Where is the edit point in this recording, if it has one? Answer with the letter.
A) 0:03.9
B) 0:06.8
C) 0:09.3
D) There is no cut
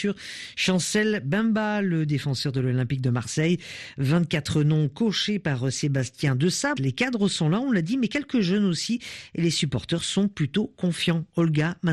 B